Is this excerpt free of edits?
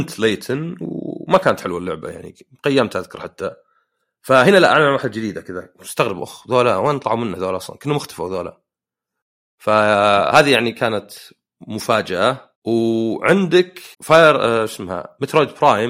no; 2 cuts; at 12.5 s, 13.9 s

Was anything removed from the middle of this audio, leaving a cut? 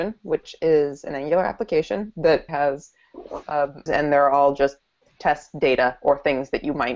yes; 2 cuts; at 2.5 s, 3.9 s

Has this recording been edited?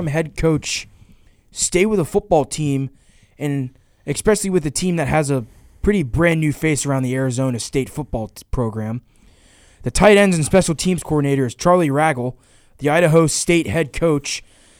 no; 0 cuts

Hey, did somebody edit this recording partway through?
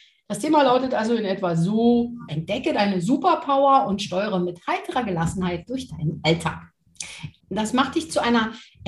yes; 2 cuts; at 2.3 s, 7.4 s

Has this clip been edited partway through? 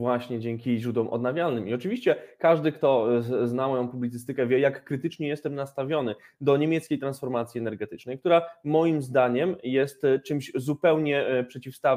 no; 0 cuts

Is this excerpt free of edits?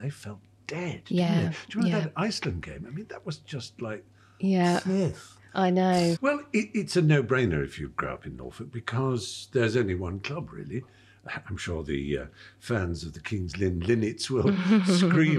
no; 1 cut; at 6.2 s

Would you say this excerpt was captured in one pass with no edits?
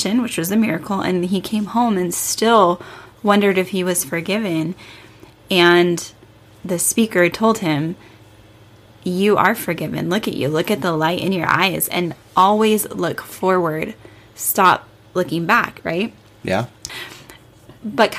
no; 2 cuts; at 15.8 s, 16.9 s

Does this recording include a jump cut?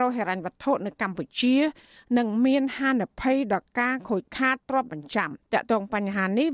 yes; 1 cut; at 5.5 s

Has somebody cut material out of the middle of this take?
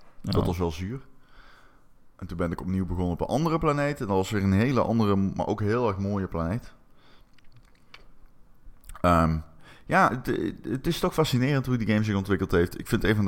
no; 0 cuts

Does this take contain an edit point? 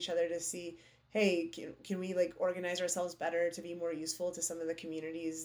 no; 0 cuts

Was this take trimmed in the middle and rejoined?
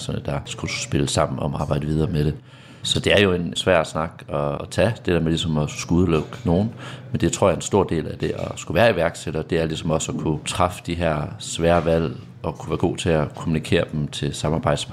yes; 1 cut; at 4.6 s

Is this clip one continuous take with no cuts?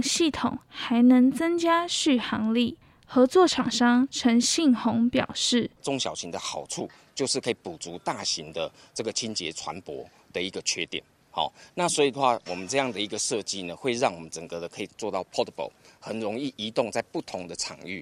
no; 2 cuts; at 5.8 s, 12.5 s

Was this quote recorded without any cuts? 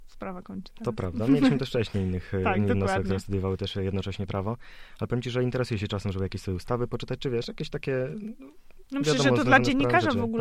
yes; 0 cuts

